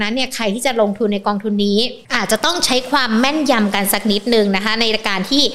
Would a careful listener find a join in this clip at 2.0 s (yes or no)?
yes